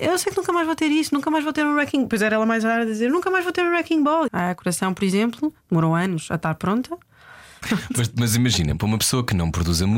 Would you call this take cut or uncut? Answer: cut